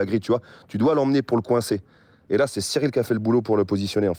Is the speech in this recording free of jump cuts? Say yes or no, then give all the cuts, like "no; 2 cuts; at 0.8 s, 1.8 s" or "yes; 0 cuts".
yes; 0 cuts